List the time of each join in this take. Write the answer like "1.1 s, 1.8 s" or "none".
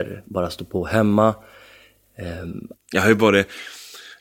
2.7 s

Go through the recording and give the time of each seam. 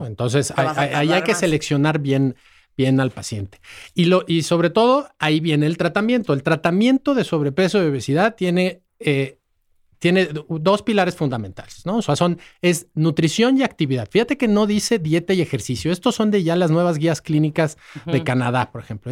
none

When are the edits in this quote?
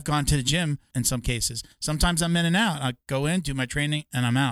0.9 s

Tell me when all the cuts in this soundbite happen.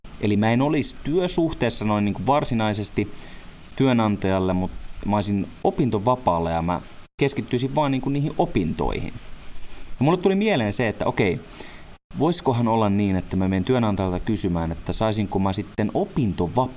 10.0 s

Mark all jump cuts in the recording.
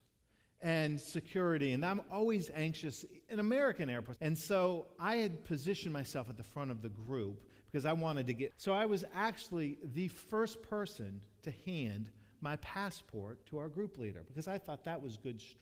4.2 s, 8.5 s

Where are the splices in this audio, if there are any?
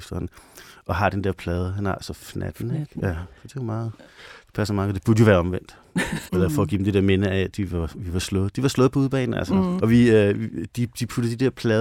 6.3 s, 9.8 s

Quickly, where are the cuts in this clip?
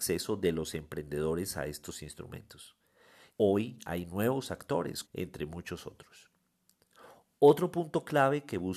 3.3 s, 5.0 s

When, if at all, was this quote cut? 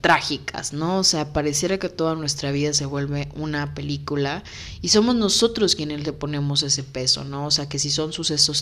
none

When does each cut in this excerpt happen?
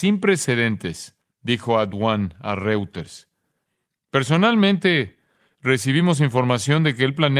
1.2 s

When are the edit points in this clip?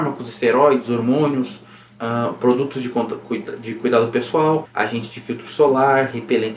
4.6 s

